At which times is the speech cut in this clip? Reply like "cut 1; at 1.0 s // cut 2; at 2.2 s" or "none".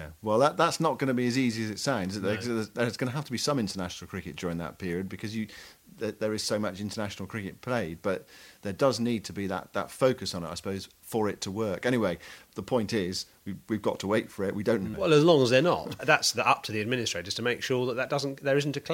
cut 1; at 14.9 s // cut 2; at 16.0 s